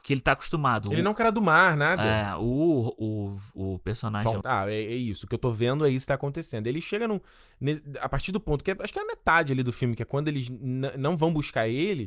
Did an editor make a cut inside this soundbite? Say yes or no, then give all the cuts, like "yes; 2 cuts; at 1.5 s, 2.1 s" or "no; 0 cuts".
yes; 1 cut; at 4.4 s